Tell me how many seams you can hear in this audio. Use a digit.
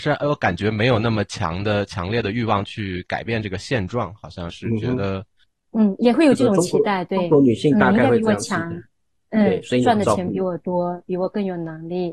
1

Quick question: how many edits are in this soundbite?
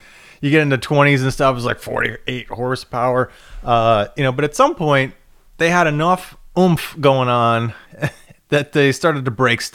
0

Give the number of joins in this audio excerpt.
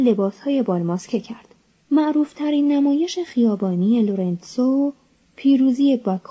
1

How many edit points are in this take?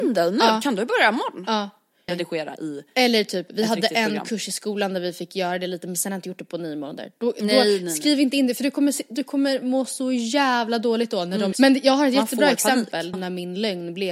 3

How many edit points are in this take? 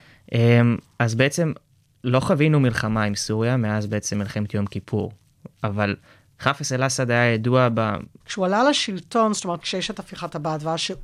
2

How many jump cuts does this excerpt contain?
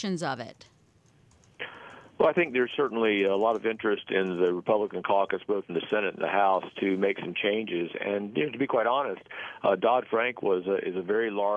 0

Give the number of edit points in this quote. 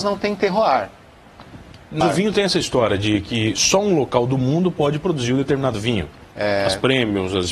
2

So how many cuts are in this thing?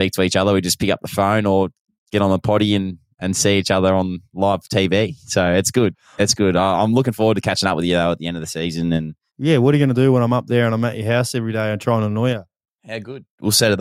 1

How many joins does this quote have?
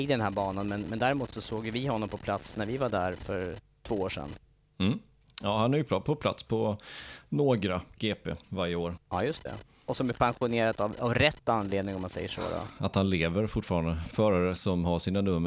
2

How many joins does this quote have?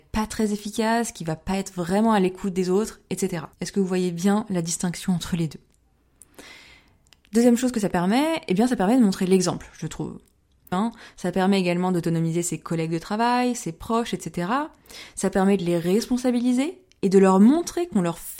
2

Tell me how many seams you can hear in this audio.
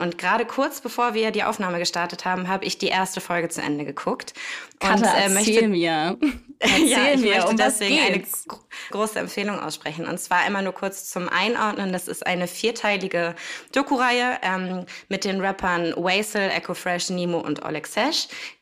1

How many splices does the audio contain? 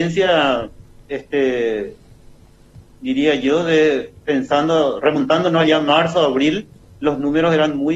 1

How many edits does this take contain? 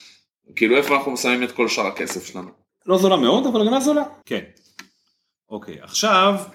2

